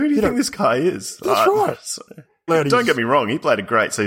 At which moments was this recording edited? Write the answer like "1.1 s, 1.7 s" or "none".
2.5 s